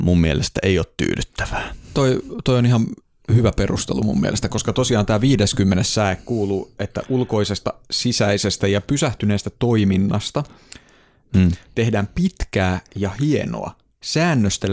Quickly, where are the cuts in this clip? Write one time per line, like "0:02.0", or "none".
0:11.3